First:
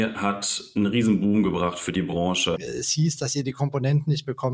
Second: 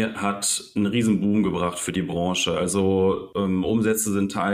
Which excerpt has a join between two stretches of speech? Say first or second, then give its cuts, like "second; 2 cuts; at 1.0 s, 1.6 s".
first; 1 cut; at 2.6 s